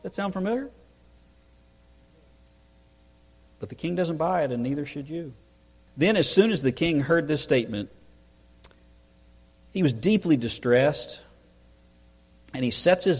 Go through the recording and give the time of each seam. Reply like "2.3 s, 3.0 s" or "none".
5.9 s